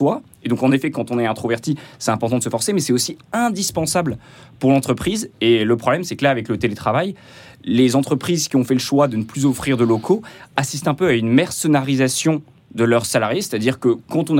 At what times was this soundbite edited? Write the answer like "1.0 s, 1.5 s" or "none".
none

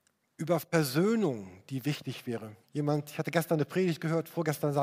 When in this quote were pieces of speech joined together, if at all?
2.6 s

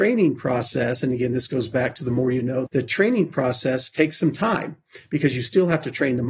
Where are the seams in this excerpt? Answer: 2.7 s

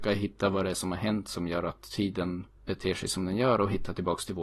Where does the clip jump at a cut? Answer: 2.5 s

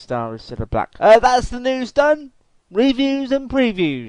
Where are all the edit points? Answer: 1.0 s

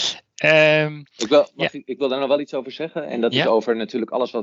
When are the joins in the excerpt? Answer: none

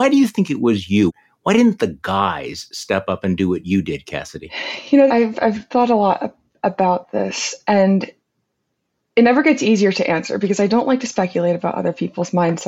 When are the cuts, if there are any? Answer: 5.1 s

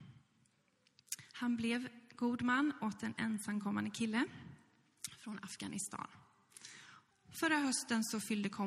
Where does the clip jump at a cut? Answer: 1.3 s, 7.1 s

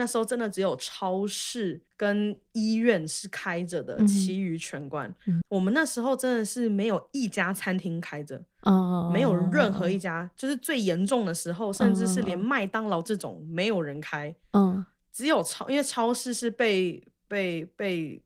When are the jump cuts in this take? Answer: 1.9 s, 5.4 s

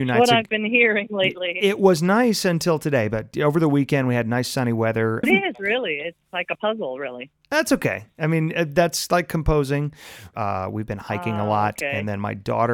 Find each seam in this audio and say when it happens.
5.2 s, 10.3 s

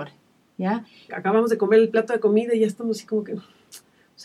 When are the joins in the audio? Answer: 1.1 s

